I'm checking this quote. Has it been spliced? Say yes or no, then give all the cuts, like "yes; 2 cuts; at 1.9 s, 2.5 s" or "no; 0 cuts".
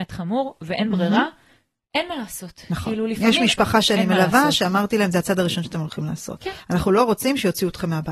no; 0 cuts